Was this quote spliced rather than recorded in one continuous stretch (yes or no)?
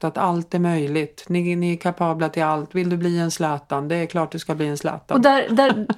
no